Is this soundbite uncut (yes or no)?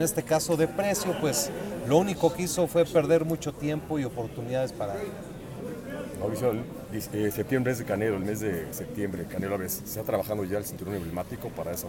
yes